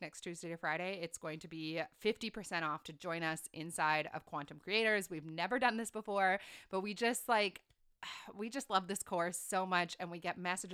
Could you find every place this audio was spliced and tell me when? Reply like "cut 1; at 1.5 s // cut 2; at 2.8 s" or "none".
none